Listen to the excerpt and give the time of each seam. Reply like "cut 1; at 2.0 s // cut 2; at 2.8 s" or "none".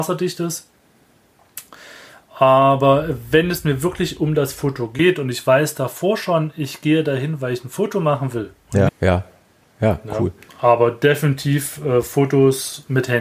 cut 1; at 8.9 s